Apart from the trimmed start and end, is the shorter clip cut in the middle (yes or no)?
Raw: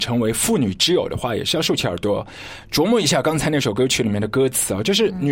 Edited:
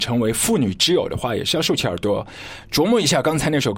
no